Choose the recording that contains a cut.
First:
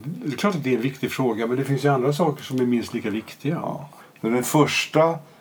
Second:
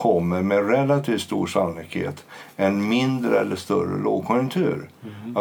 first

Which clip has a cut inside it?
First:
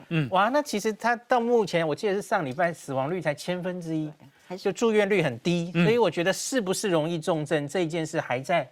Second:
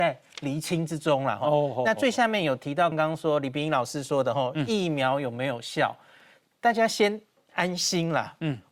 second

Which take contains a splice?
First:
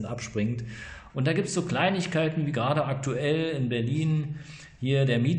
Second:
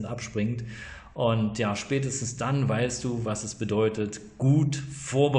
first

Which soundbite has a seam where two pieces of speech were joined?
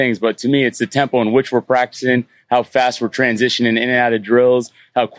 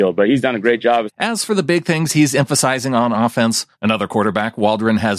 second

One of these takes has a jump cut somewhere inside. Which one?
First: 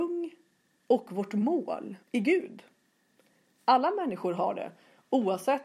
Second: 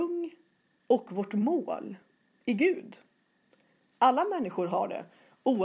first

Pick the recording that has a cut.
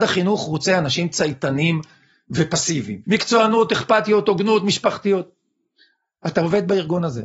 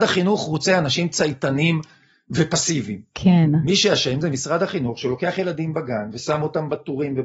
first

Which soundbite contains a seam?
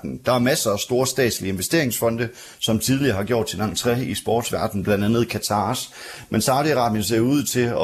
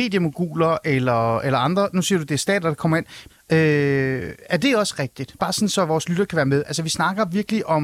second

